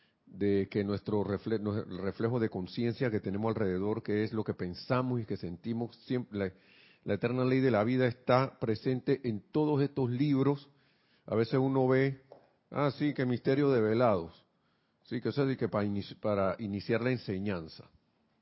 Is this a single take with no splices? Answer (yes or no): yes